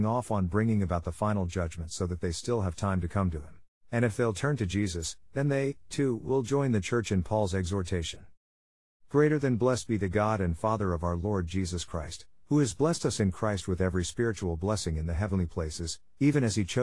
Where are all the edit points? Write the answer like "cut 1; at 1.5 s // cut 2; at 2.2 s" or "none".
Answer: cut 1; at 3.7 s